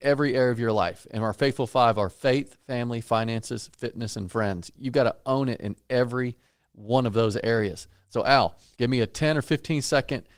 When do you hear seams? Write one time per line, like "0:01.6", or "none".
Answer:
0:08.7